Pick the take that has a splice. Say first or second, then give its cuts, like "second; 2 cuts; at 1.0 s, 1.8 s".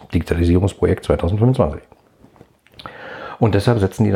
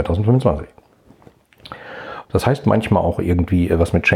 second; 1 cut; at 2.2 s